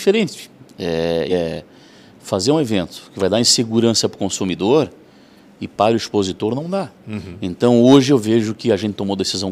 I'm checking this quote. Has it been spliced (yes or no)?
yes